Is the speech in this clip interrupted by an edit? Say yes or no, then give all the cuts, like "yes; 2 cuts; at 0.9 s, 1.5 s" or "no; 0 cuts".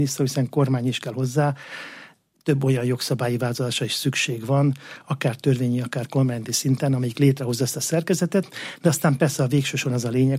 no; 0 cuts